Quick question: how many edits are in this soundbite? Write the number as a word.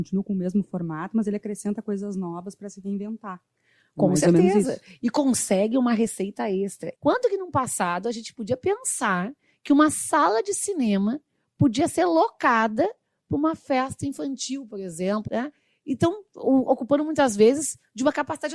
two